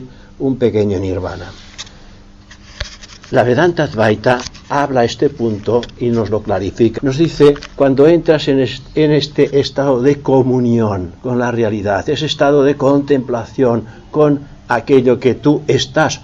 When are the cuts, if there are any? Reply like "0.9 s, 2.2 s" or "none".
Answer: 7.0 s, 11.2 s